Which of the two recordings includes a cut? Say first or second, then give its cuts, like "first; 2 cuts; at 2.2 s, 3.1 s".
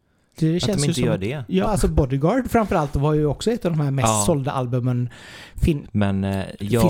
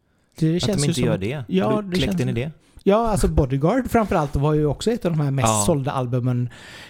first; 2 cuts; at 1.6 s, 5.8 s